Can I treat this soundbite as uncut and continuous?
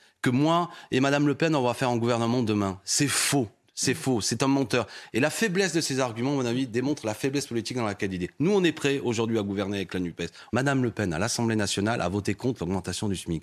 no; 1 cut; at 10.5 s

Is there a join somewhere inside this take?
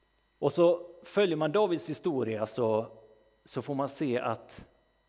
no; 0 cuts

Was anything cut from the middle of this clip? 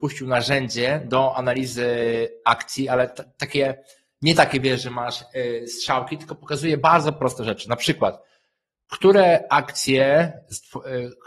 no; 0 cuts

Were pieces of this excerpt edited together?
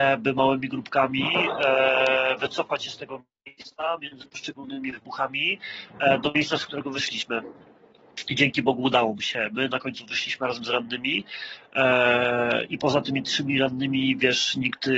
yes; 1 cut; at 12.7 s

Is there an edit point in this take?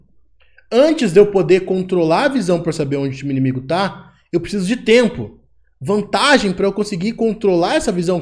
no; 0 cuts

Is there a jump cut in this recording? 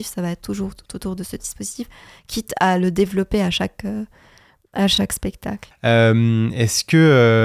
yes; 1 cut; at 5.7 s

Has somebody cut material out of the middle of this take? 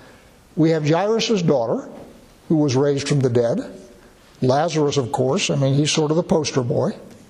no; 0 cuts

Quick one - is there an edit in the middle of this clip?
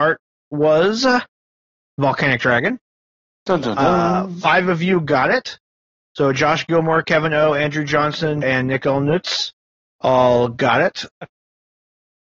yes; 2 cuts; at 8.4 s, 11.1 s

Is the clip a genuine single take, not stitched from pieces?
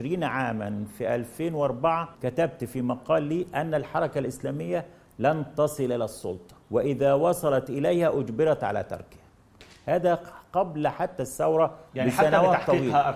no; 2 cuts; at 2.1 s, 6.6 s

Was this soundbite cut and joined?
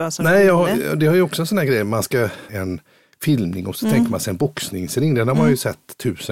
yes; 1 cut; at 2.5 s

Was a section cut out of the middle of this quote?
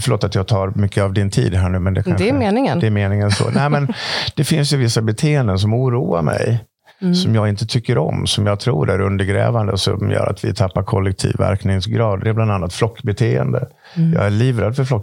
no; 0 cuts

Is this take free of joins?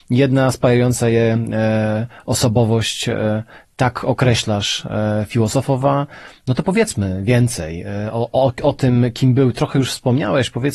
yes; 0 cuts

